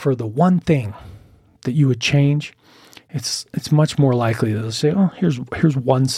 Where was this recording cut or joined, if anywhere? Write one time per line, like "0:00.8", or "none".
none